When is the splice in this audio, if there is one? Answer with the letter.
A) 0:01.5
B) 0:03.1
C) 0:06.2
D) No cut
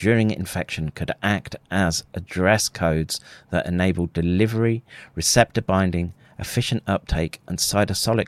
D